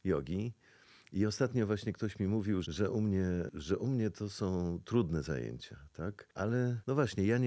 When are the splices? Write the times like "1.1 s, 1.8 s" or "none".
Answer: 2.6 s

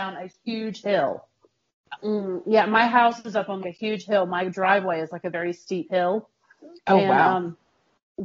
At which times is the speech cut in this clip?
2.0 s, 3.6 s

